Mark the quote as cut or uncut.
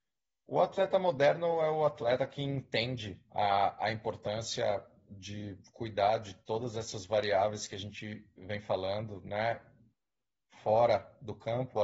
uncut